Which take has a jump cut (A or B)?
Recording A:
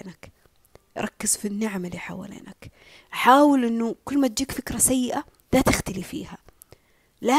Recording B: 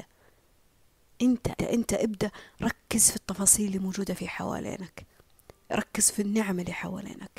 B